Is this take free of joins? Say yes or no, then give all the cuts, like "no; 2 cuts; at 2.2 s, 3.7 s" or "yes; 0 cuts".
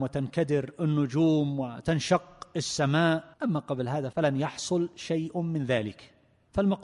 no; 1 cut; at 3.3 s